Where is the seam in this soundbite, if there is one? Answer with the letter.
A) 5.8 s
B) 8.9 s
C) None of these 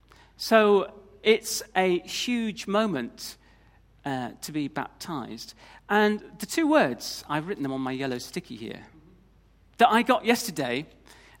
C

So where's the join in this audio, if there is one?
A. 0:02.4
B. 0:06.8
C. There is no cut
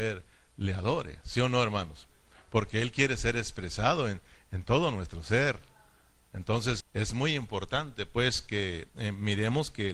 B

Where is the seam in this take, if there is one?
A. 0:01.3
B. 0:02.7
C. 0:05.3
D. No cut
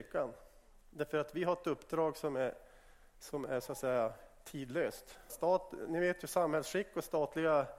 C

